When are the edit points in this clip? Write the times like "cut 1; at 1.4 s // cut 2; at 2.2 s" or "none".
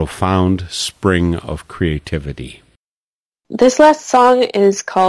none